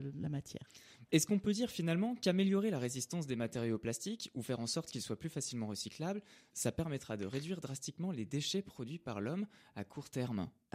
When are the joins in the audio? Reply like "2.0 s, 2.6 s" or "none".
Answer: none